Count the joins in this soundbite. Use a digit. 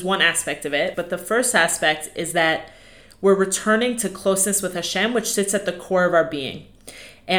1